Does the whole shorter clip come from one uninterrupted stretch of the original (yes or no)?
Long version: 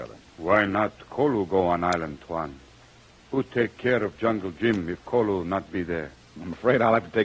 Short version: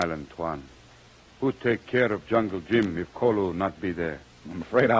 yes